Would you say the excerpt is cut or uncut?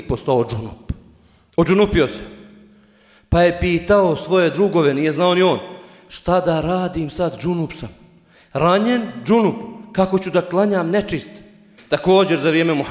cut